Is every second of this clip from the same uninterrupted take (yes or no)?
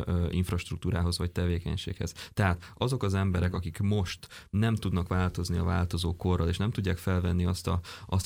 yes